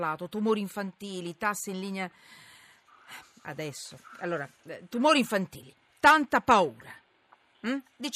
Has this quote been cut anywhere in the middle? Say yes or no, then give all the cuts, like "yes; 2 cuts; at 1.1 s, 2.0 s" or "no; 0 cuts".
no; 0 cuts